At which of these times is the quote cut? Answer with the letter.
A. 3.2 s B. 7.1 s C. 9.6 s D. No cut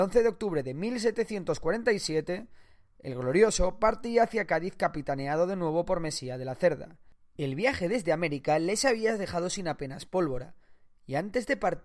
D